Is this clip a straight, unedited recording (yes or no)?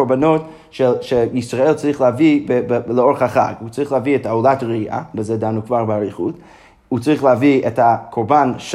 yes